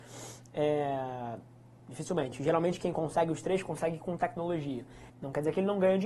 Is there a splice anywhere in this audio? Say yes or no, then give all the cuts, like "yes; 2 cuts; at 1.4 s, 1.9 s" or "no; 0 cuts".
yes; 2 cuts; at 1.8 s, 5.1 s